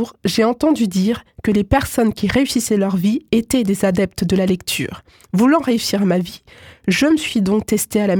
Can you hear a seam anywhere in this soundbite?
no; 0 cuts

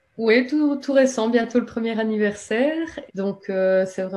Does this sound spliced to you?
yes; 1 cut; at 3.1 s

